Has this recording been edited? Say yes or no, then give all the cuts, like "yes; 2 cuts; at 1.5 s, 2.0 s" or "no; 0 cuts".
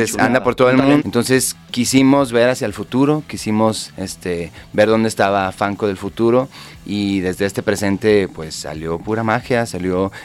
yes; 1 cut; at 1.0 s